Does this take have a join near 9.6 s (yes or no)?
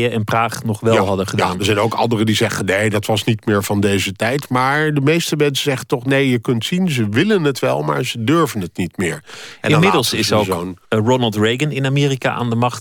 no